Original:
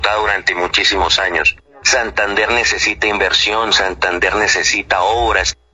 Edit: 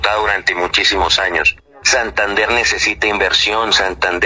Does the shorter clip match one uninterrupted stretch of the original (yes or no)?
yes